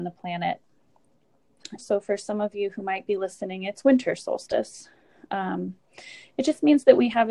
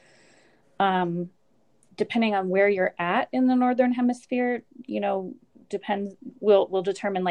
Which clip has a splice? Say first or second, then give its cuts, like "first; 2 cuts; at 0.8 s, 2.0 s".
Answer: first; 1 cut; at 1.8 s